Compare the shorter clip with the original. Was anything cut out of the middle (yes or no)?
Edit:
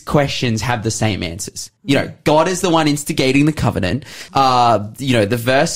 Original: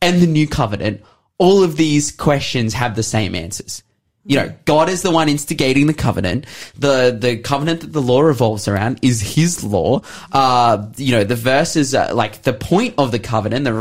yes